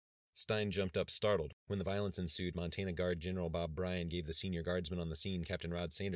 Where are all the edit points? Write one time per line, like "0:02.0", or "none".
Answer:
0:01.5

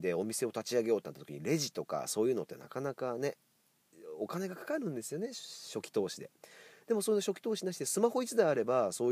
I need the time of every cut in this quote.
none

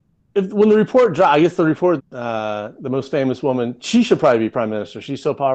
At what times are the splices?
0:02.0

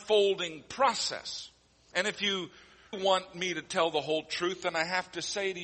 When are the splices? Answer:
0:02.9

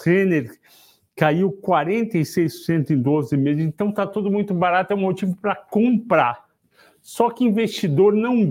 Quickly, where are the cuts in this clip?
none

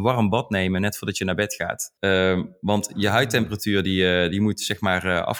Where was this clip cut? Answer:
0:02.0

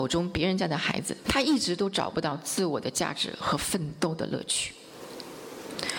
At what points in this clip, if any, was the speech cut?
0:01.2

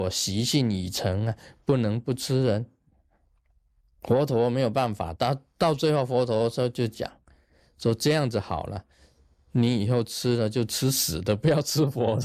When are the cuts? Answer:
none

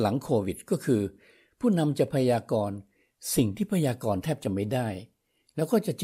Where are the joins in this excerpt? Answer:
none

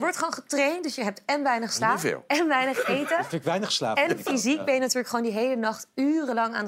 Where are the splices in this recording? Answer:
none

